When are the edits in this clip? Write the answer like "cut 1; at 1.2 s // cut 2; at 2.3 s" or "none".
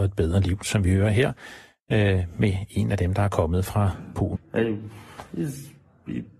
cut 1; at 4.3 s